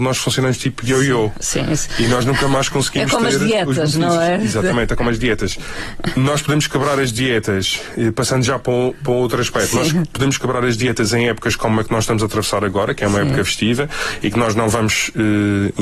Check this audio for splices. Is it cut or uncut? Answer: uncut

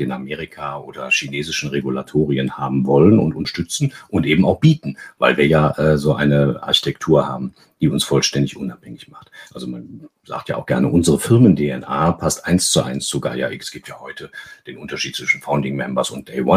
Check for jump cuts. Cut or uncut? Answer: cut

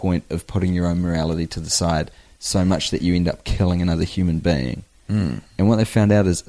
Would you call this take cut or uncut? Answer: uncut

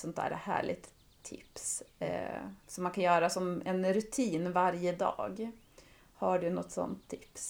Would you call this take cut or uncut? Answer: uncut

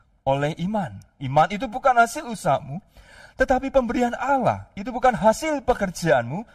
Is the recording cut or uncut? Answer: cut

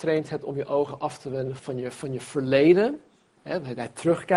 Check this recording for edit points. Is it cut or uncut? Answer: cut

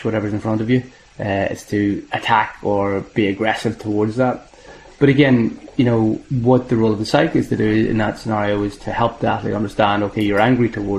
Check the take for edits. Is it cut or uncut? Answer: uncut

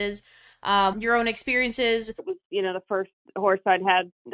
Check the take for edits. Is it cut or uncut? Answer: cut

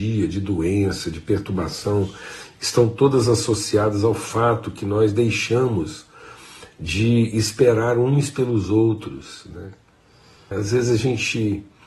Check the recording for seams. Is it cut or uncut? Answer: cut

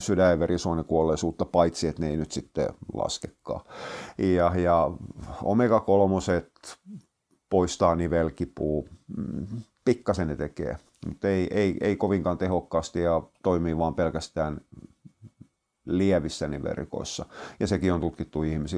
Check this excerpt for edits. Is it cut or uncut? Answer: uncut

